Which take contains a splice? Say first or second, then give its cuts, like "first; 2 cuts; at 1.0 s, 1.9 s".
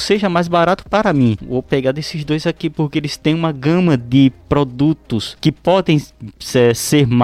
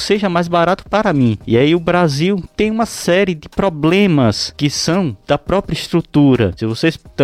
first; 1 cut; at 1.4 s